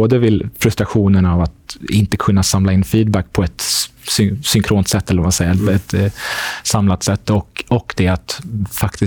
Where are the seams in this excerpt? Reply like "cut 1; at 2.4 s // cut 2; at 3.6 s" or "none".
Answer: none

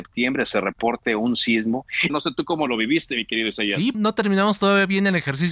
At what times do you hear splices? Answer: cut 1; at 2.1 s // cut 2; at 3.9 s

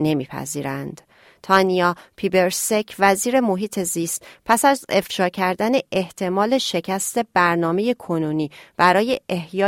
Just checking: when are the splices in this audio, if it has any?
none

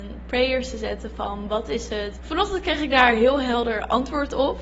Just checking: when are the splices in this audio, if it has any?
cut 1; at 2.2 s

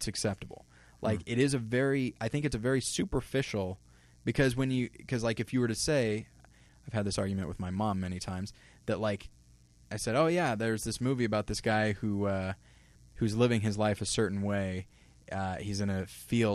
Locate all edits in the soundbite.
none

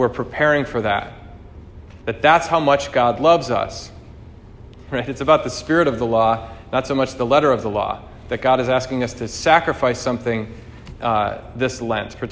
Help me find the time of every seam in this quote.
cut 1; at 2.0 s // cut 2; at 4.9 s

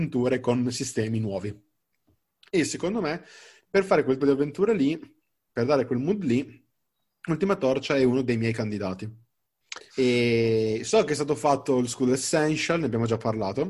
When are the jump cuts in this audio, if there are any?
cut 1; at 4.2 s // cut 2; at 9.9 s

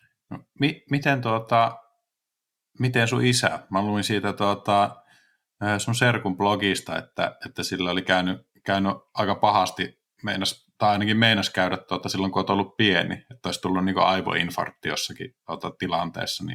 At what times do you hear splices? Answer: none

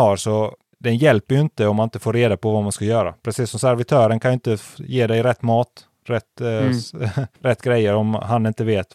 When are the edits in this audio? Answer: none

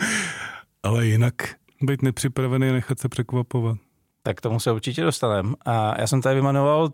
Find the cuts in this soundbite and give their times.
cut 1; at 1.7 s

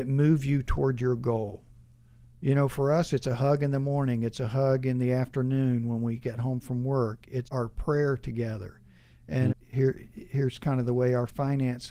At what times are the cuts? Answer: cut 1; at 7.4 s // cut 2; at 9.5 s

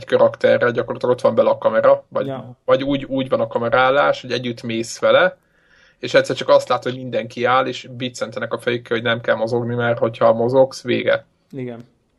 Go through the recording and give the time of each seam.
none

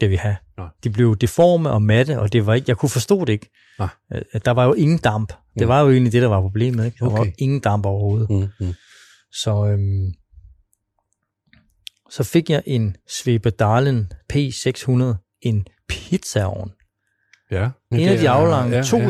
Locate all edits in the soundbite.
cut 1; at 17.9 s

